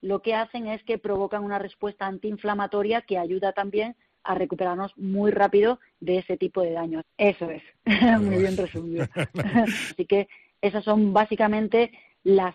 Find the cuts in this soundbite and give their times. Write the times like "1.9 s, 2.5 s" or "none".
7.0 s, 9.9 s